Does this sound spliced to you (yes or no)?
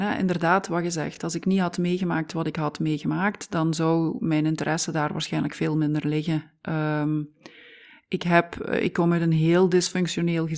no